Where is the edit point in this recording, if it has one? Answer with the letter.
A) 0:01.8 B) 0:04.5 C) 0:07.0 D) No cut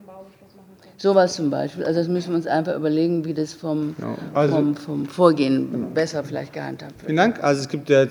D